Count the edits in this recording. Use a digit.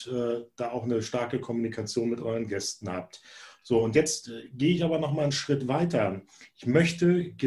0